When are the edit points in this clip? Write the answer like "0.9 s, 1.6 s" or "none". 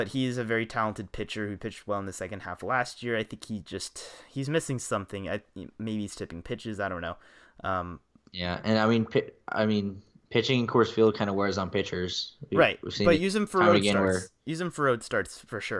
none